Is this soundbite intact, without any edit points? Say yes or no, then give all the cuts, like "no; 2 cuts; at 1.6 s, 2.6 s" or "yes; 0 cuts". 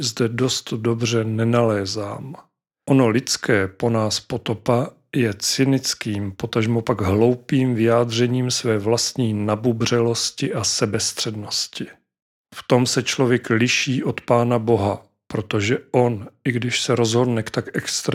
yes; 0 cuts